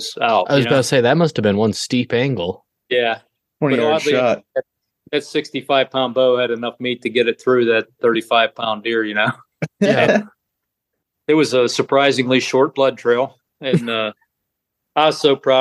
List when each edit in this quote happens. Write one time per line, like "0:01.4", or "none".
none